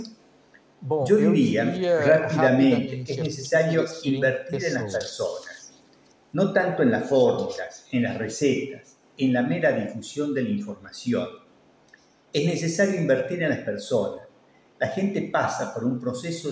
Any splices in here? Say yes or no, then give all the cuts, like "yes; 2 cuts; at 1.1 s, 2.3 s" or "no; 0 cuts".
no; 0 cuts